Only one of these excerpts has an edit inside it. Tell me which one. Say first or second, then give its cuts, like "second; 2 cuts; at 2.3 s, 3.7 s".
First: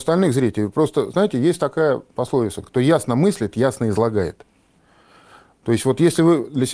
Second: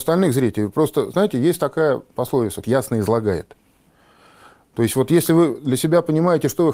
second; 1 cut; at 2.6 s